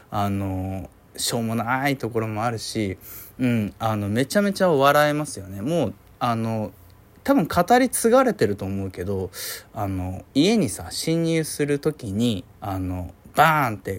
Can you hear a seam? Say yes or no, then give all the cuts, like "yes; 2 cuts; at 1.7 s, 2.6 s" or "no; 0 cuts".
yes; 2 cuts; at 10.3 s, 12.5 s